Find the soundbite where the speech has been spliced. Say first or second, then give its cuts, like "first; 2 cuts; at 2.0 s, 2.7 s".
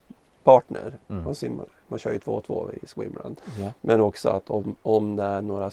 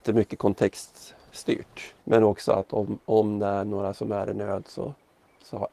second; 1 cut; at 2.0 s